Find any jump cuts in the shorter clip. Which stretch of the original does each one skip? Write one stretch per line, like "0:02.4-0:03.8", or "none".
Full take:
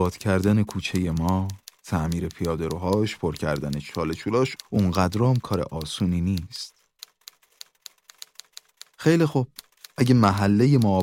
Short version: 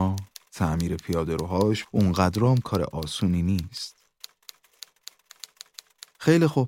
0:03.2-0:04.6